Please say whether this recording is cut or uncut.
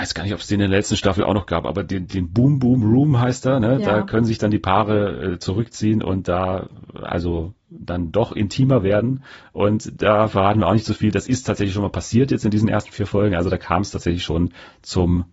uncut